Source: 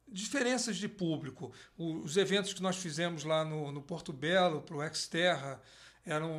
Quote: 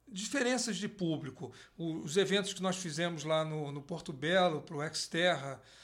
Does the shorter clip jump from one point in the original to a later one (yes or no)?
no